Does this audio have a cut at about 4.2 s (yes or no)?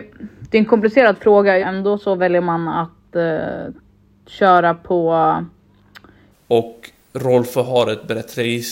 no